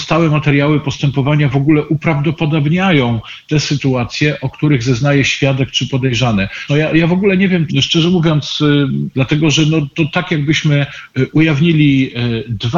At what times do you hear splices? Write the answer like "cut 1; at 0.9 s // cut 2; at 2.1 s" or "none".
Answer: cut 1; at 6.7 s // cut 2; at 7.7 s // cut 3; at 9.1 s